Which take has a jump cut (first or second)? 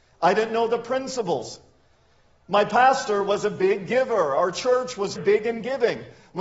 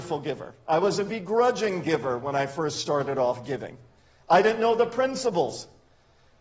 first